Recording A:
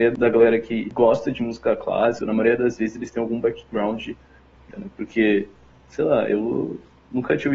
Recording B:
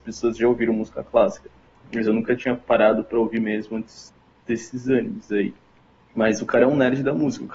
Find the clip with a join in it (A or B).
A